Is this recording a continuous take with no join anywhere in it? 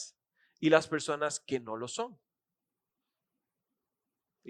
yes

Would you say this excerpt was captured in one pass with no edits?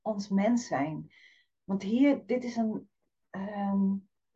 yes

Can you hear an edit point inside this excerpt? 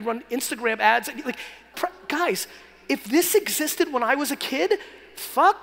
yes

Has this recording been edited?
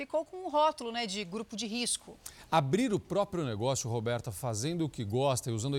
no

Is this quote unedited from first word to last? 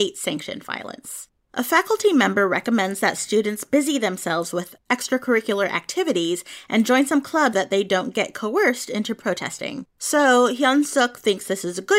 no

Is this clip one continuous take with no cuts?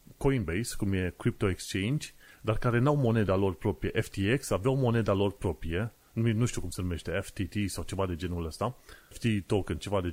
no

